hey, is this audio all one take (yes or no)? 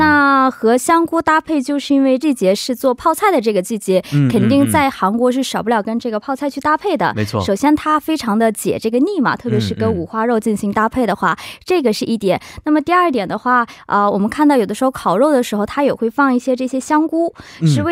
no